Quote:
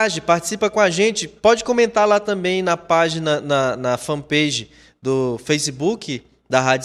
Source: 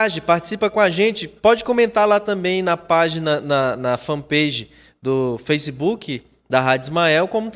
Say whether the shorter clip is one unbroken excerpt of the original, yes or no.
yes